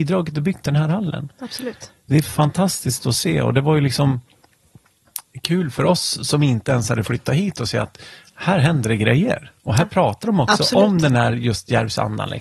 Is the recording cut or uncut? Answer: uncut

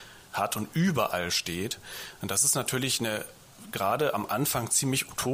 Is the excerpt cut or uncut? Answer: uncut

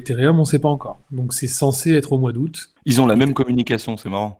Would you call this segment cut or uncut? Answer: cut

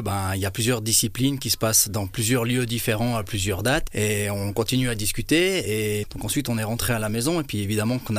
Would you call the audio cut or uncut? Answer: cut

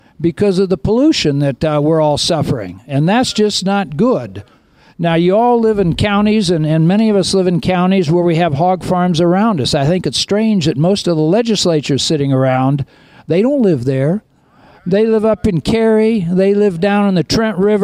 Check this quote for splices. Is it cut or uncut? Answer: uncut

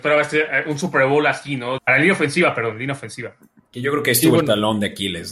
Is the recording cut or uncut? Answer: cut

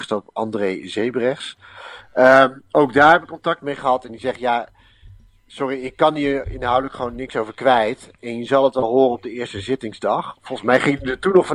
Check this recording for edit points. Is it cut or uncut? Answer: uncut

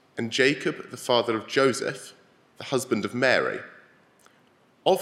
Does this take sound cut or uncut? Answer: uncut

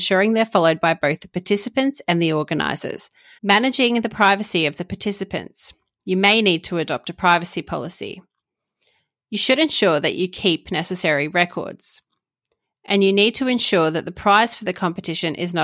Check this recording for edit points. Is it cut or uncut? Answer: cut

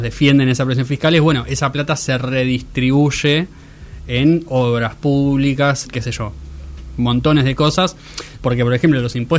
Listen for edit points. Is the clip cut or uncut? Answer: cut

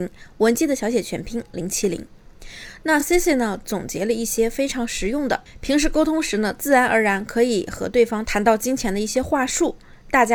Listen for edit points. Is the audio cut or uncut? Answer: uncut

